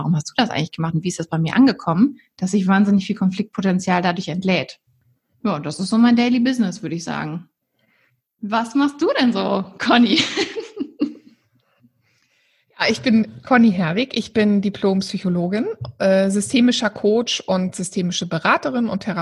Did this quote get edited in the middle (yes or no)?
no